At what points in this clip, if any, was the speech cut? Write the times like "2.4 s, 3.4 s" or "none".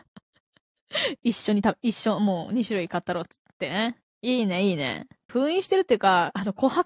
5.3 s